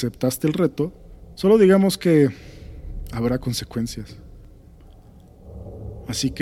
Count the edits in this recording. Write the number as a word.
one